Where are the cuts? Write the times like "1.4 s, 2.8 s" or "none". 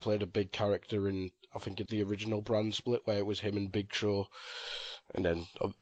1.9 s